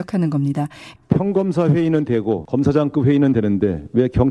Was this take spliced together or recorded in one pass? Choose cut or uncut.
cut